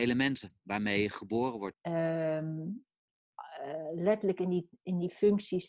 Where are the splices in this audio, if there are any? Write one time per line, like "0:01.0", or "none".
0:01.7